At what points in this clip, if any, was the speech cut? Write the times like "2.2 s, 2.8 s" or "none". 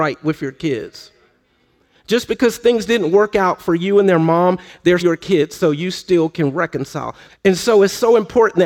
5.0 s, 7.3 s